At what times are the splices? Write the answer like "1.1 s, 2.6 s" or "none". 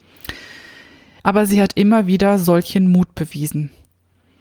1.2 s